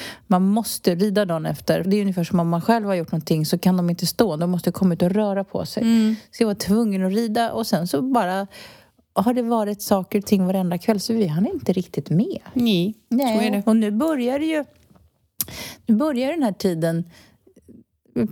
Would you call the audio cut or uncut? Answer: cut